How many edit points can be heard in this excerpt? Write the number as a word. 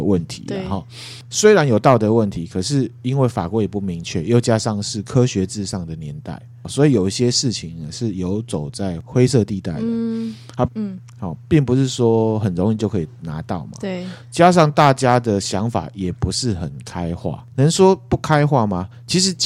one